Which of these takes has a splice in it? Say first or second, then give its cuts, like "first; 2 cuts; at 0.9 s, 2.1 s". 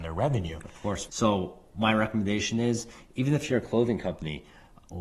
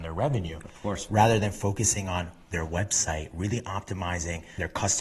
first; 1 cut; at 1.1 s